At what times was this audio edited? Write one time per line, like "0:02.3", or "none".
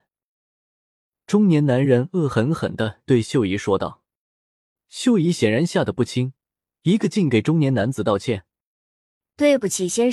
none